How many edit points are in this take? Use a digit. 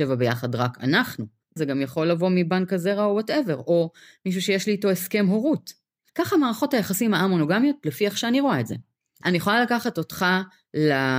2